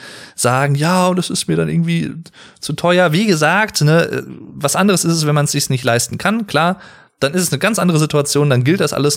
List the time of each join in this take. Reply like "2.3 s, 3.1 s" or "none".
none